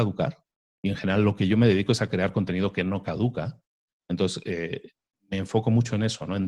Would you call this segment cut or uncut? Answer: uncut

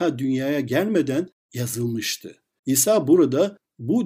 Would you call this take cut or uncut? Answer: cut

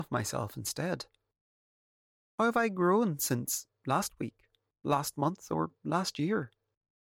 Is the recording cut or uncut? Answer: uncut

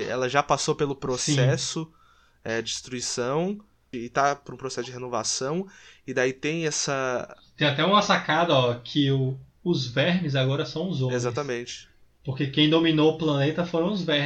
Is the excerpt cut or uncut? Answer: cut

